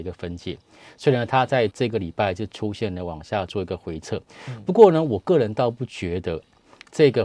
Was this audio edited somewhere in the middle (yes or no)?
yes